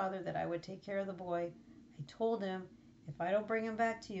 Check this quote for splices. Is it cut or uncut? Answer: uncut